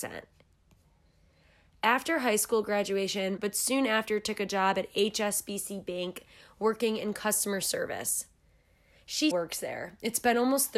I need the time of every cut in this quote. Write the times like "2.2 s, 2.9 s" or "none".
3.4 s, 9.3 s